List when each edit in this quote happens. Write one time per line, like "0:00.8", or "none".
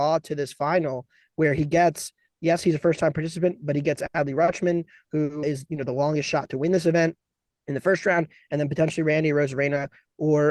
0:05.4